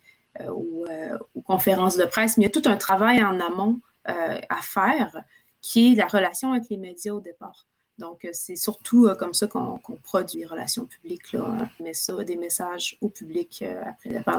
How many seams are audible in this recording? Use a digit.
2